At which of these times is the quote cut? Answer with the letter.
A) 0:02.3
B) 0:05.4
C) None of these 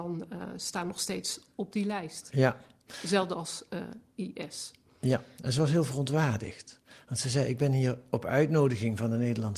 B